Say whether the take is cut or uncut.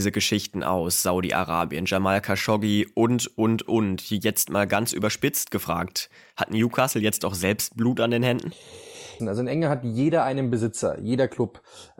cut